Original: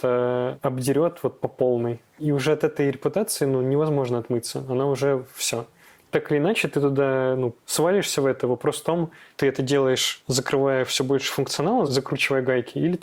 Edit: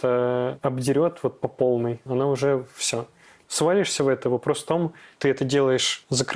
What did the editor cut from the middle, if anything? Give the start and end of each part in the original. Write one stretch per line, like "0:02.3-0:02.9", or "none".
0:02.1-0:04.7
0:06.0-0:07.6